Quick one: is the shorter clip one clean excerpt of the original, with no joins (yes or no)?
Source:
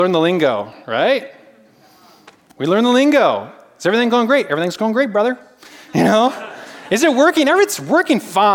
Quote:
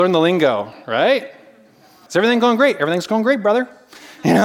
no